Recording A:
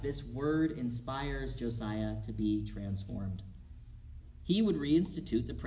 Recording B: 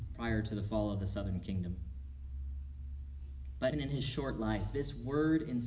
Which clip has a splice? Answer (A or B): B